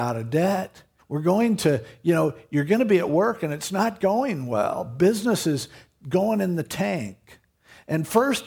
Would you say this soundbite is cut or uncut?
cut